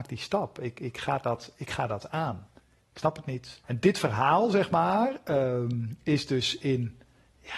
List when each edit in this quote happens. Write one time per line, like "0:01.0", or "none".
0:03.6